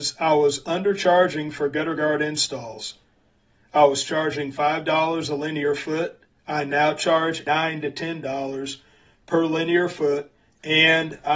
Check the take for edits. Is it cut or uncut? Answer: uncut